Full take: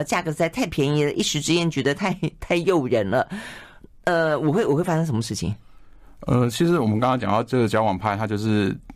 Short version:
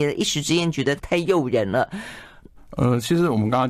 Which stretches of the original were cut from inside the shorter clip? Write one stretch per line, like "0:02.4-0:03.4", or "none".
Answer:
0:02.0-0:02.4
0:03.9-0:06.1